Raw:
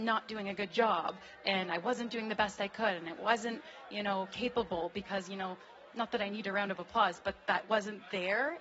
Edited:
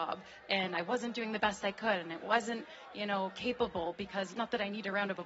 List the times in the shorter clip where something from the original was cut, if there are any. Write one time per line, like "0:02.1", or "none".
0:04.3

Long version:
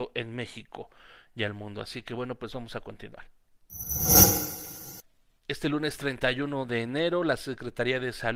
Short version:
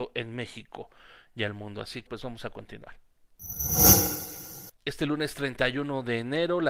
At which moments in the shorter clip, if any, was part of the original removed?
0:02.1
0:04.8

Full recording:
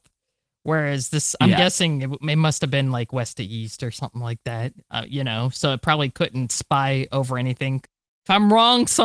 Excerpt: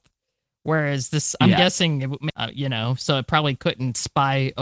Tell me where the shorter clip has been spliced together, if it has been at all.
0:02.3

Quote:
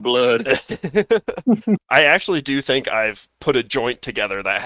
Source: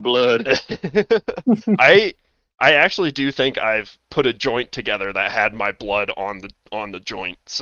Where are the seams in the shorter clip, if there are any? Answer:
0:01.8

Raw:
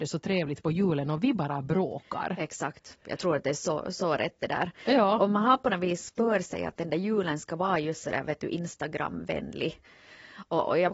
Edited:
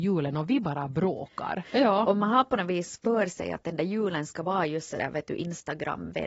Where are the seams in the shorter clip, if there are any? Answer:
0:01.6

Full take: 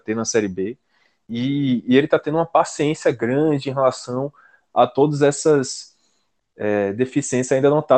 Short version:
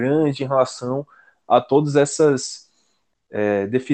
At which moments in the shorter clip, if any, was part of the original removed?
none

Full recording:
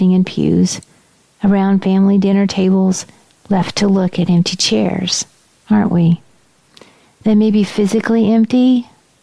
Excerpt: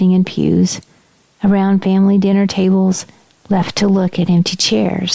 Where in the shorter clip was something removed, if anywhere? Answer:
none

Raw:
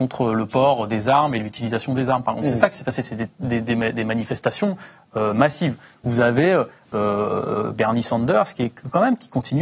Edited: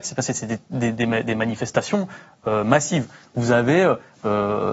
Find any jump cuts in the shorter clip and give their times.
none

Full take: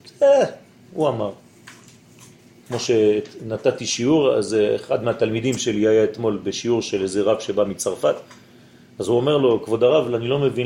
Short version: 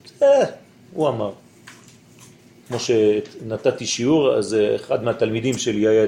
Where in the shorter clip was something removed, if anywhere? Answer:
none

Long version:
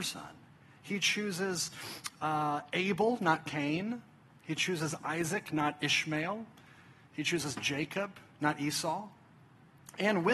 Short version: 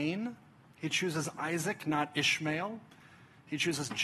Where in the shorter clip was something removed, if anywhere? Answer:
none

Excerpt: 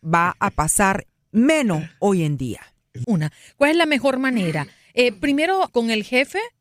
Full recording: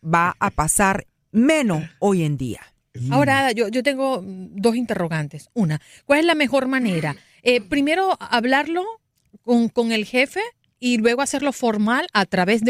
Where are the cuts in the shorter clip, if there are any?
0:03.0
0:05.7

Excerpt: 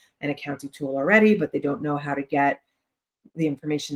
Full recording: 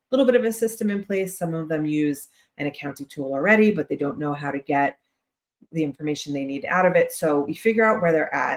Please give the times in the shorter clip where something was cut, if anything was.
none

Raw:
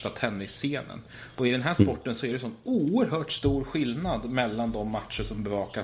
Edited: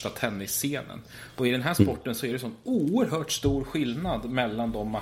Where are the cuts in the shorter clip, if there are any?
none

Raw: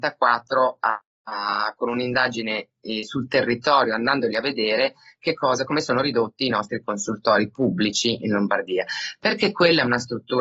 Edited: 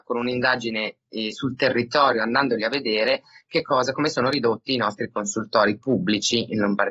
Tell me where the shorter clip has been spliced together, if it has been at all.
none

